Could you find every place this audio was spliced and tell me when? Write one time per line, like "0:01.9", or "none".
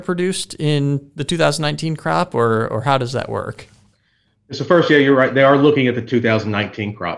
none